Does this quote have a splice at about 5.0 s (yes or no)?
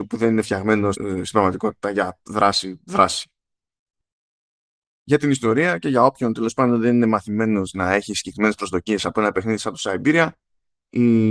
no